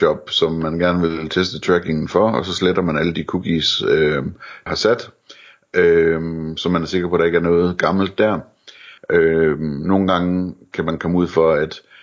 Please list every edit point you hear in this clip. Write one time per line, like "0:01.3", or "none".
0:04.7
0:09.0